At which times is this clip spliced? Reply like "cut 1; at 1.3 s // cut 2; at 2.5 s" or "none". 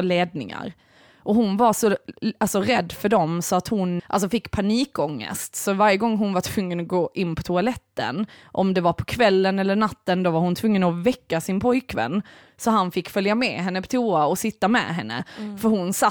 cut 1; at 4.0 s